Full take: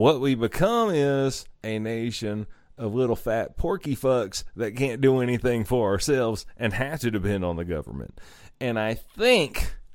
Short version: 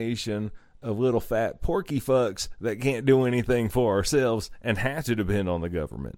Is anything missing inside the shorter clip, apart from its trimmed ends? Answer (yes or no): no